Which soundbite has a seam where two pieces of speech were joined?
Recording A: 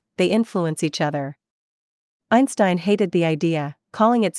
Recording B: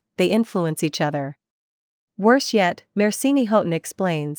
B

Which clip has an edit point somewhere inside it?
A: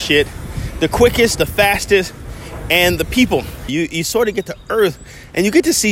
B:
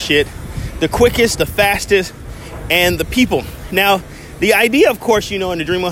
A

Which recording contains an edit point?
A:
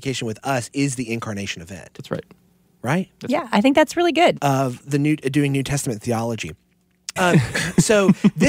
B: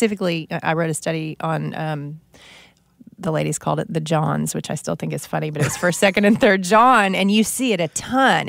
A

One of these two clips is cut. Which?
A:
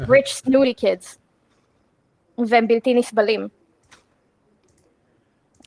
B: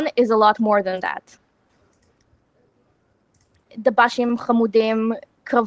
B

